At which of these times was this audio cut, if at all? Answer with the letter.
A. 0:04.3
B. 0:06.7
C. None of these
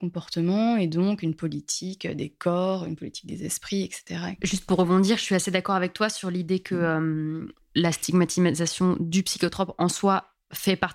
A